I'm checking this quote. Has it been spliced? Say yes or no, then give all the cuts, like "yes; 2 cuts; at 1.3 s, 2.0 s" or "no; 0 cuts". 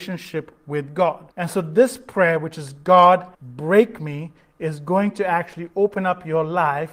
yes; 2 cuts; at 1.3 s, 3.3 s